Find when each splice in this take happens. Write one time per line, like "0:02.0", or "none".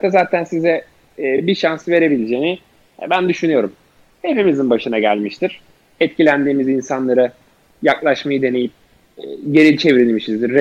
none